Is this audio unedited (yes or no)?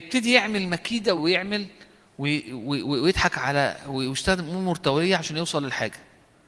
no